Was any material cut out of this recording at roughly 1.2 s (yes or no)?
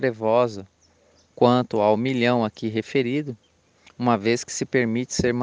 no